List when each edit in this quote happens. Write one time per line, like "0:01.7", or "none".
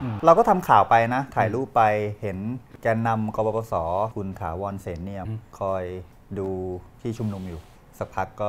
0:05.3